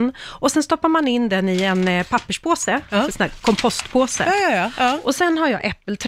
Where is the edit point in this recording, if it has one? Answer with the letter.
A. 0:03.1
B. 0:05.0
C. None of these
A